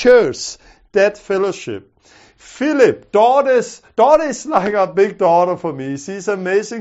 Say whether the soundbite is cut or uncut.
uncut